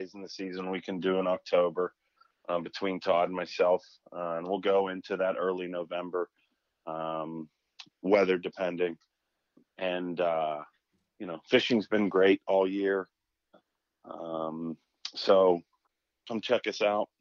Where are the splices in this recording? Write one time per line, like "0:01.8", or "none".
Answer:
none